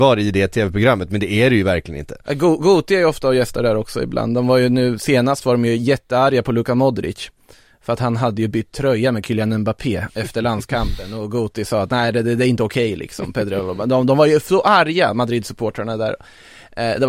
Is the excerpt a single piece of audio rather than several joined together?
yes; 0 cuts

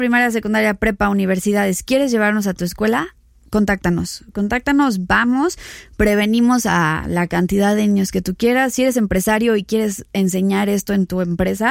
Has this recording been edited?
no; 0 cuts

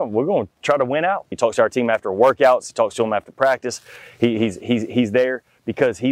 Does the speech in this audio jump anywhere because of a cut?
yes; 1 cut; at 1.3 s

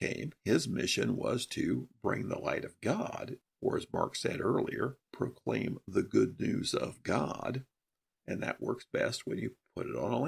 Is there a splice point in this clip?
yes; 2 cuts; at 3.4 s, 8.1 s

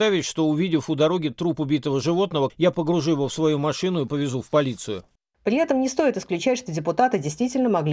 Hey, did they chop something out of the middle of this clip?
yes; 1 cut; at 2.5 s

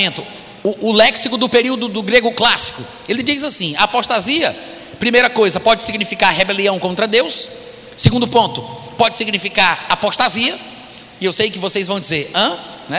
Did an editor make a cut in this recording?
no; 0 cuts

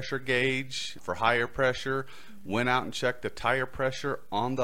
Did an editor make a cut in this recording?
yes; 1 cut; at 1.0 s

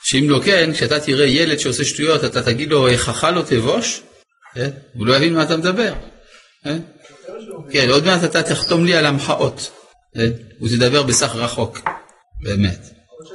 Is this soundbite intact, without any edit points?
yes; 0 cuts

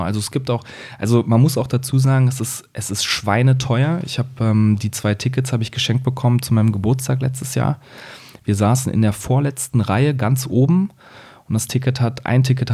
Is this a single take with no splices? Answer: yes; 0 cuts

